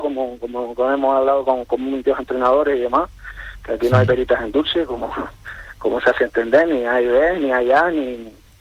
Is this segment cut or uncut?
uncut